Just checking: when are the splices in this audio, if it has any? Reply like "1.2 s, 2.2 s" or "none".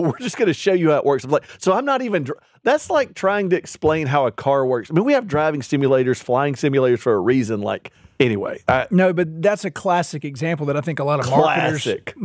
none

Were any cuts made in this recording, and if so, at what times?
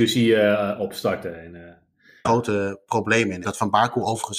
2.2 s, 3.4 s

